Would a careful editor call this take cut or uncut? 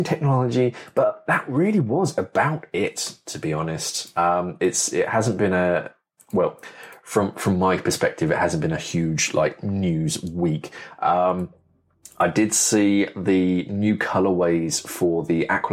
uncut